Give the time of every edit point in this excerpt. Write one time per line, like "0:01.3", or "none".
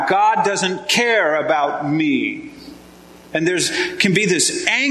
none